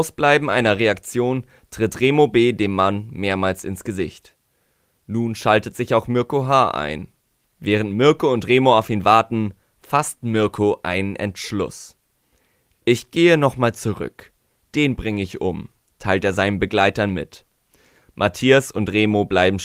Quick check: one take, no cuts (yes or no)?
no